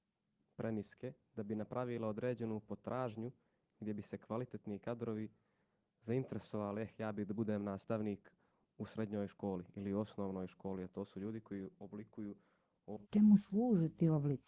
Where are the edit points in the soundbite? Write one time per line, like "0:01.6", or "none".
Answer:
0:13.0